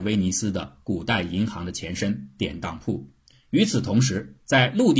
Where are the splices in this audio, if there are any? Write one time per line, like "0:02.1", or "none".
0:03.3